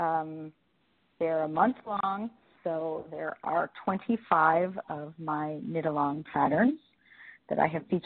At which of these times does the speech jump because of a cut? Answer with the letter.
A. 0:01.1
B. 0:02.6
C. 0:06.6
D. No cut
B